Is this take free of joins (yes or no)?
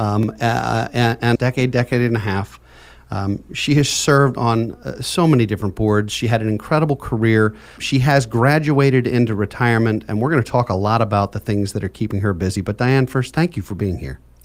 no